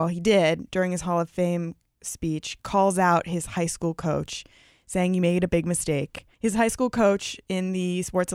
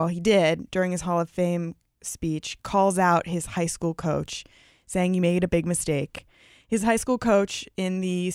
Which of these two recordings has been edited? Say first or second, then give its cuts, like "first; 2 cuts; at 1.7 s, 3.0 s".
first; 1 cut; at 6.3 s